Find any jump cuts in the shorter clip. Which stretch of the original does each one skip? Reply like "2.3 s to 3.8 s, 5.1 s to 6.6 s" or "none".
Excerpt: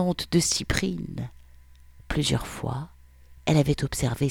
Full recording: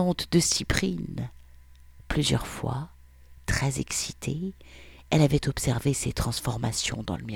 3.4 s to 5.0 s